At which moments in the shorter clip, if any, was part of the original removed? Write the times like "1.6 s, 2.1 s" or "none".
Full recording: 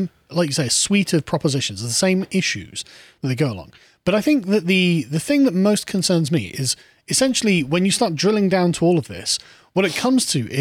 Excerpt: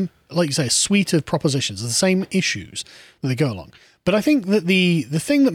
none